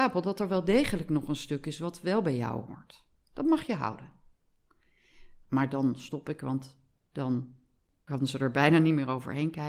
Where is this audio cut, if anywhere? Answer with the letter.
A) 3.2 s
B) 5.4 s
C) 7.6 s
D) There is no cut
B